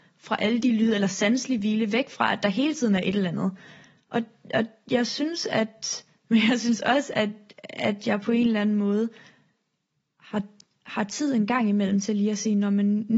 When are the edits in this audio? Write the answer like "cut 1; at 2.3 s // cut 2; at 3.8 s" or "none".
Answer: cut 1; at 6.2 s